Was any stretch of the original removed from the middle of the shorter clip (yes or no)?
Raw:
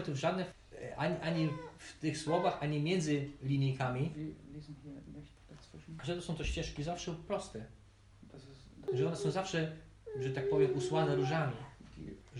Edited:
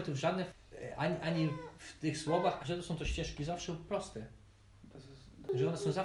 yes